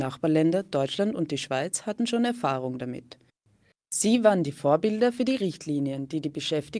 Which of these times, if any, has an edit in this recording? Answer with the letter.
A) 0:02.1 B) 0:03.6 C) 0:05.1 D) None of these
D